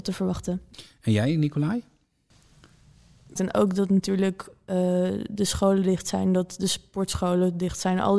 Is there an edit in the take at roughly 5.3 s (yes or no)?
no